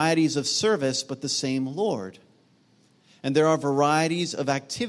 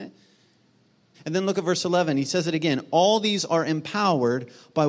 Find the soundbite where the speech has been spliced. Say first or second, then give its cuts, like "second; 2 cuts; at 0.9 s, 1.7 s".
second; 1 cut; at 1.1 s